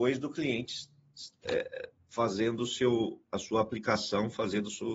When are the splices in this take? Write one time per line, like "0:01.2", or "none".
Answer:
none